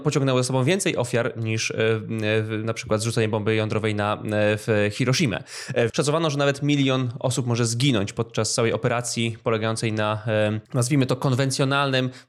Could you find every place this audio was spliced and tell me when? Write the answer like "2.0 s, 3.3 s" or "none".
5.9 s, 10.7 s